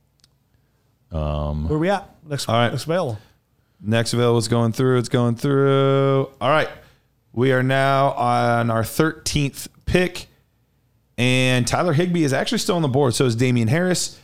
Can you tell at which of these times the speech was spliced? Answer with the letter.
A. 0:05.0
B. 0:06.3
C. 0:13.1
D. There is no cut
D